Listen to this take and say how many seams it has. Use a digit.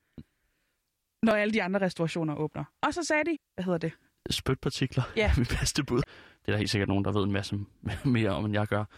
2